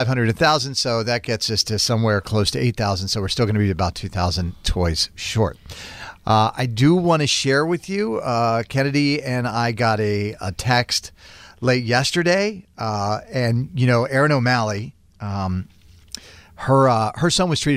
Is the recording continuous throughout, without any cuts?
yes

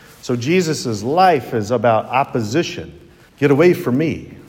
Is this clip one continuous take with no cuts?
no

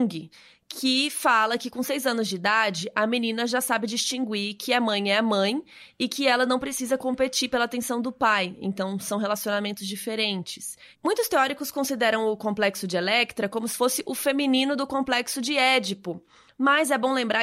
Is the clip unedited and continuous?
yes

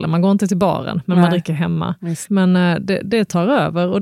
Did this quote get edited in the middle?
yes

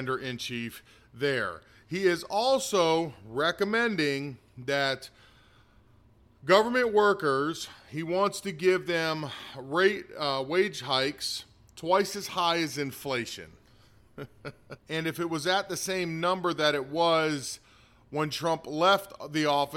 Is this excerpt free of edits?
no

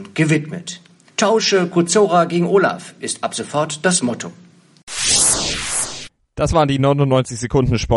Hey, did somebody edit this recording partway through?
yes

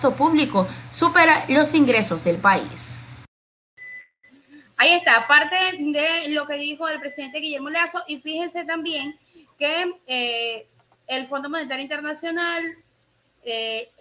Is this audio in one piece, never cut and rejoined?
yes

